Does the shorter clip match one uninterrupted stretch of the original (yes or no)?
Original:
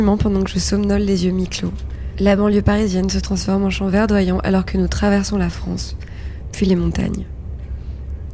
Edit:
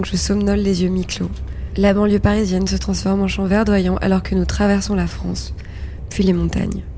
yes